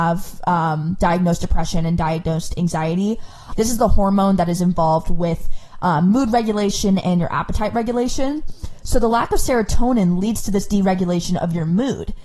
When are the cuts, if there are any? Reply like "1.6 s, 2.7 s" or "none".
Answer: 3.5 s

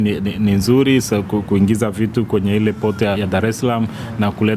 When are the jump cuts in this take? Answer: 3.1 s

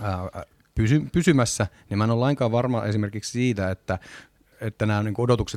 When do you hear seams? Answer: 4.5 s

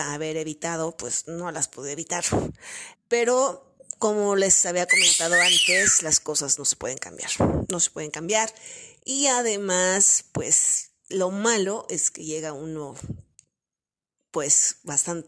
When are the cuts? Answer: 2.9 s

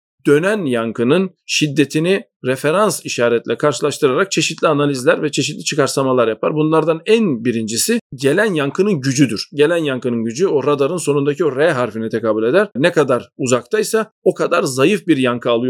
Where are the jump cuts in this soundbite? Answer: 12.8 s

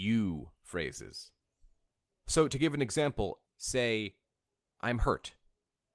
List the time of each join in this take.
3.5 s

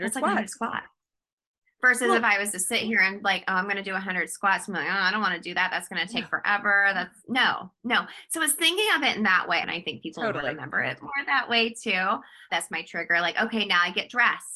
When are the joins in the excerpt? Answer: 9.6 s, 12.5 s

